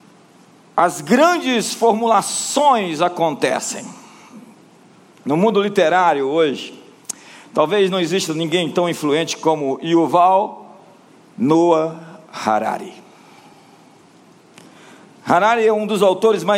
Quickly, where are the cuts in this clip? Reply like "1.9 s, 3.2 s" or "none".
none

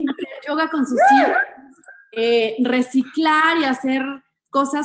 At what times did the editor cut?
none

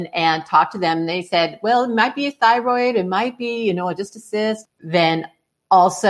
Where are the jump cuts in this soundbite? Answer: 4.6 s

